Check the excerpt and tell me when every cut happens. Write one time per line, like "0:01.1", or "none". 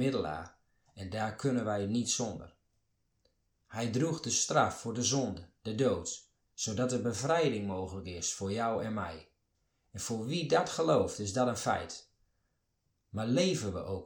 0:06.5